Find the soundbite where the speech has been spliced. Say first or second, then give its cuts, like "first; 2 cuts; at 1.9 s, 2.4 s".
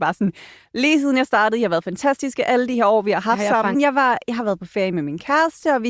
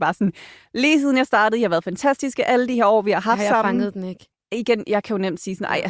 first; 1 cut; at 3.7 s